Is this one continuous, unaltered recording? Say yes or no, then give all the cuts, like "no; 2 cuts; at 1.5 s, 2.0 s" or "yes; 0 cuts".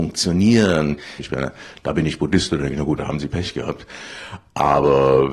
no; 2 cuts; at 1.2 s, 3.0 s